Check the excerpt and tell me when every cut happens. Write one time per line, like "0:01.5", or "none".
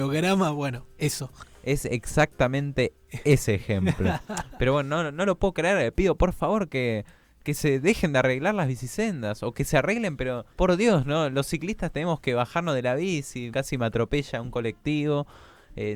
0:10.5
0:13.5